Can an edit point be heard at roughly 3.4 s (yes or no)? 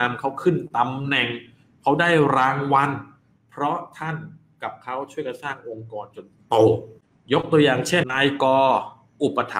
no